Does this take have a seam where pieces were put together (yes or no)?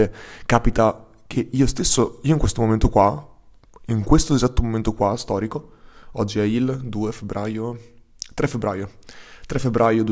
no